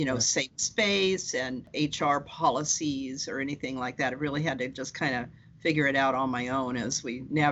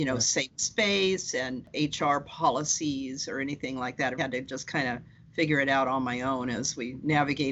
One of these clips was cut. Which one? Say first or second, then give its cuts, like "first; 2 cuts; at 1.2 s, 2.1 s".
second; 1 cut; at 4.2 s